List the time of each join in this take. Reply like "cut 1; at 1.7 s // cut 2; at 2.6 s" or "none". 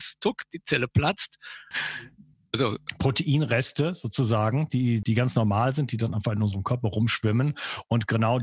cut 1; at 1.7 s // cut 2; at 5.0 s